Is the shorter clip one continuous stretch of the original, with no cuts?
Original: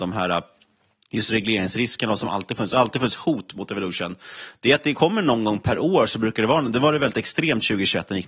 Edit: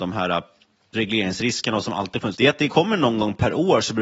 no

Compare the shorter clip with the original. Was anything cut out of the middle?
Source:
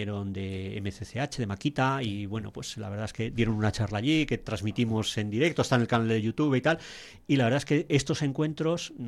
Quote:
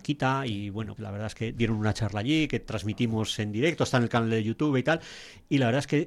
yes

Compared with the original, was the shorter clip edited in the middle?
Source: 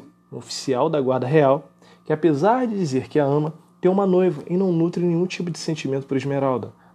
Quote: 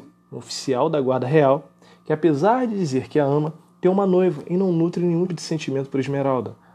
yes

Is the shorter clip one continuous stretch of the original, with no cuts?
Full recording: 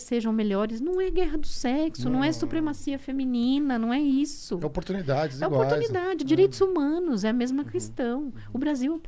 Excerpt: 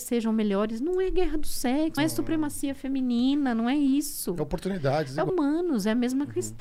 no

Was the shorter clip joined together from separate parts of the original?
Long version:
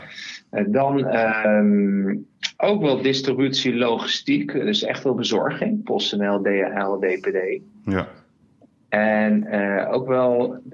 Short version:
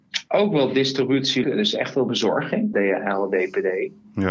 yes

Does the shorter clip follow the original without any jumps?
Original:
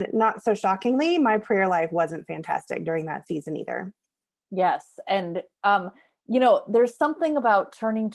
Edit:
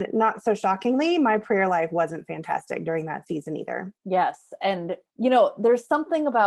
no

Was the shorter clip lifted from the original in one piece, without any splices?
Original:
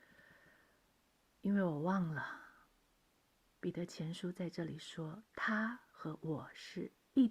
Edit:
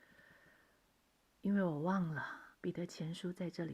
no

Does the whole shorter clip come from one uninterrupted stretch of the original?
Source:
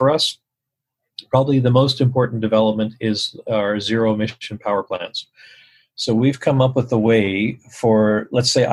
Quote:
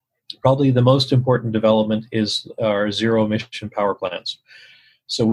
yes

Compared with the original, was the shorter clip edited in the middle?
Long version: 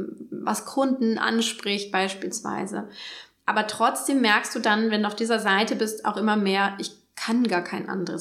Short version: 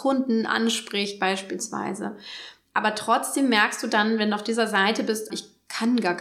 yes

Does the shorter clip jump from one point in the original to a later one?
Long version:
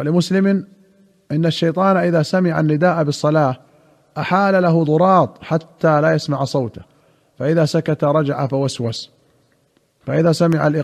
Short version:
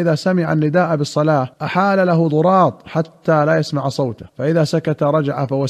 yes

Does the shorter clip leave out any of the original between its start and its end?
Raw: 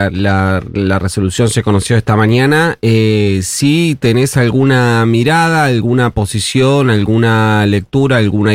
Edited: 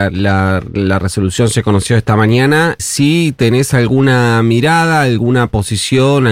yes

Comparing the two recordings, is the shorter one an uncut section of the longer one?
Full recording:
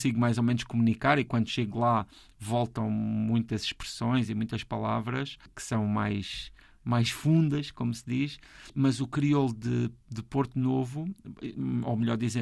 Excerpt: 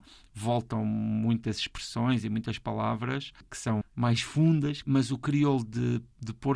no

